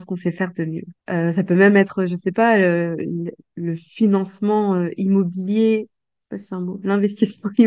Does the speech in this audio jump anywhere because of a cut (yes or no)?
yes